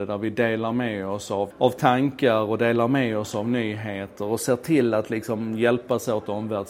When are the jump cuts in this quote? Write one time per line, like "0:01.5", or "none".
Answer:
0:01.5